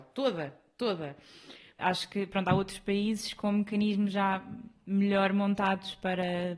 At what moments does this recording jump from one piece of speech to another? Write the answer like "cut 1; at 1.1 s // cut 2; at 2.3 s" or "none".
cut 1; at 1.8 s